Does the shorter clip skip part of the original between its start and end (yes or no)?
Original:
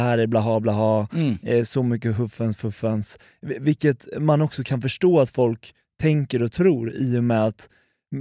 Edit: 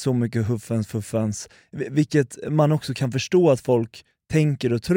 no